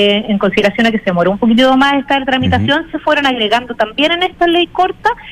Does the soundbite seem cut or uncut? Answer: uncut